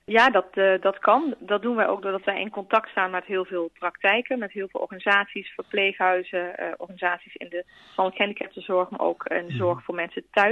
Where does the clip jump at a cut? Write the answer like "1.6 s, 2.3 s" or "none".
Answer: none